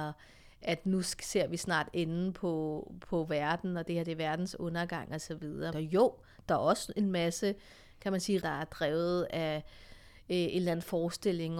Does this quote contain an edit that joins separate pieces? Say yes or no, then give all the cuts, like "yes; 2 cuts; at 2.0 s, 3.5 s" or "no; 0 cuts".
yes; 2 cuts; at 5.7 s, 8.4 s